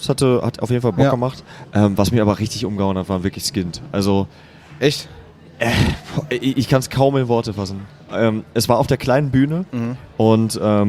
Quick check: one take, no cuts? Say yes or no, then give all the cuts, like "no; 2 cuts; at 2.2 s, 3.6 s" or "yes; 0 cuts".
yes; 0 cuts